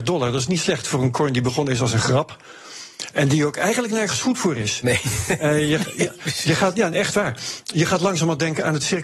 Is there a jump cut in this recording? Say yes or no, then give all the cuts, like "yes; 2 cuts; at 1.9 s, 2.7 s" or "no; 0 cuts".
no; 0 cuts